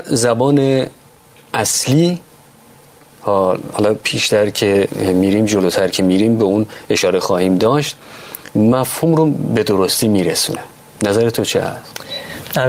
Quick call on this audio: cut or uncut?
uncut